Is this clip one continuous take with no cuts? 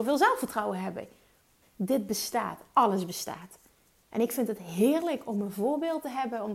no; 1 cut; at 1.6 s

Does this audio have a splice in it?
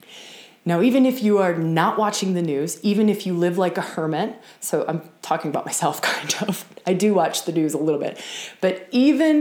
no; 0 cuts

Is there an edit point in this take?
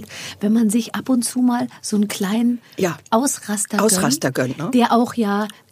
no; 0 cuts

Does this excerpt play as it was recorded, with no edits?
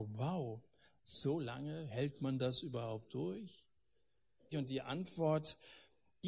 no; 1 cut; at 4.5 s

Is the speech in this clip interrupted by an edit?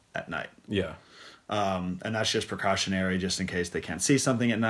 no; 0 cuts

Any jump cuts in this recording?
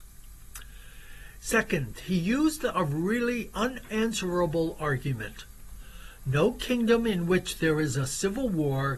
yes; 1 cut; at 1.4 s

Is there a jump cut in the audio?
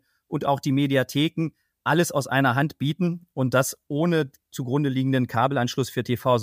no; 0 cuts

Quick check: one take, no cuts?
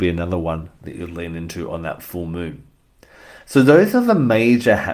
yes; 0 cuts

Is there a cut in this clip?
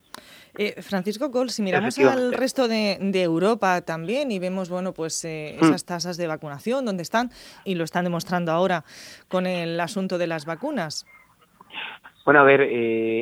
yes; 1 cut; at 7.6 s

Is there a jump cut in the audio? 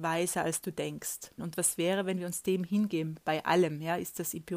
yes; 1 cut; at 1.4 s

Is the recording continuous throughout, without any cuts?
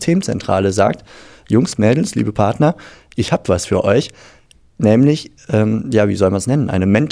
yes; 0 cuts

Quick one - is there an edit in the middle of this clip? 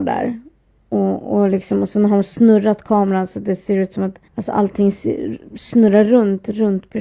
yes; 1 cut; at 4.2 s

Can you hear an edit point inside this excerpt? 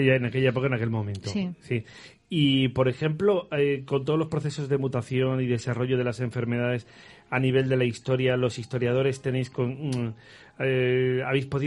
no; 0 cuts

